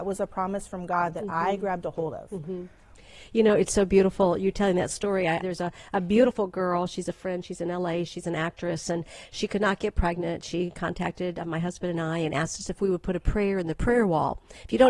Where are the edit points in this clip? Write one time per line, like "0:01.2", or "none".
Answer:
0:05.4